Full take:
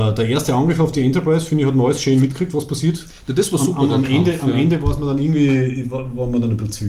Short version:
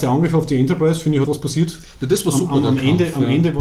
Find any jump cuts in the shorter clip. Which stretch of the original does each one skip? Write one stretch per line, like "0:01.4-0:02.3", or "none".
0:01.7-0:02.5